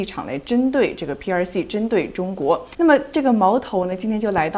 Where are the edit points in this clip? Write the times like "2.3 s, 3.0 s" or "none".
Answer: 2.7 s

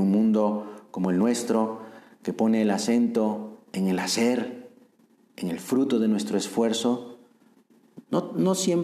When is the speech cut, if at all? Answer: none

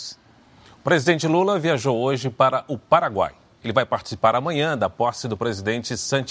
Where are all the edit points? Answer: none

